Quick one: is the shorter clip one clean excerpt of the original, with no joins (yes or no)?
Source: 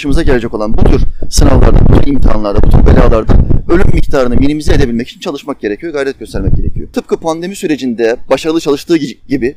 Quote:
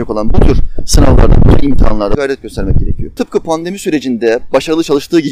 no